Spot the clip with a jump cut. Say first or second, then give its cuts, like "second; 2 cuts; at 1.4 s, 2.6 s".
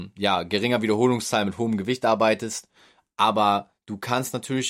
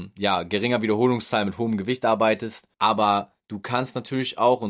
second; 1 cut; at 2.7 s